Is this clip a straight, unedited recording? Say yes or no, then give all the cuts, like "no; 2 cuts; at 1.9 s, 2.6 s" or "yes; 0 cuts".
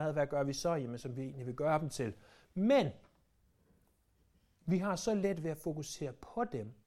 no; 1 cut; at 1.0 s